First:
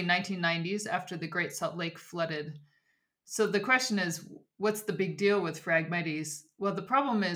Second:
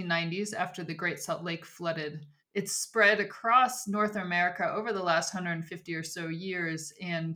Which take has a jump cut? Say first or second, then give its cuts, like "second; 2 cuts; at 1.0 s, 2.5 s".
second; 1 cut; at 2.4 s